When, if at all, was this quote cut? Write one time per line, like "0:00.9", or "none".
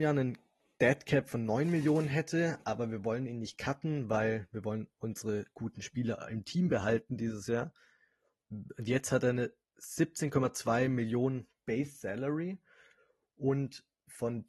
0:08.4